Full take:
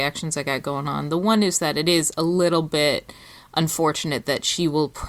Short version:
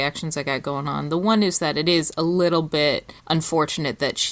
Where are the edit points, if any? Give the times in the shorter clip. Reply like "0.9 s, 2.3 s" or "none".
3.2 s